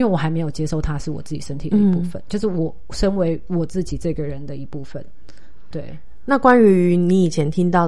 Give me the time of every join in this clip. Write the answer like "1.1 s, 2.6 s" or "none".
5.7 s